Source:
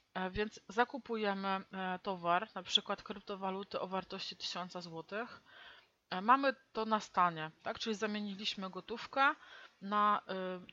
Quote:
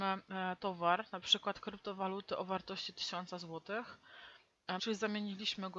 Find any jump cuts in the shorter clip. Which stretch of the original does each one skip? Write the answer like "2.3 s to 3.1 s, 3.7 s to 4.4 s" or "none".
6.2 s to 7.8 s